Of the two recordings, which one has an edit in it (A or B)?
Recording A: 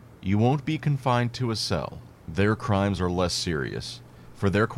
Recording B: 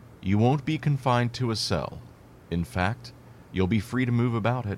A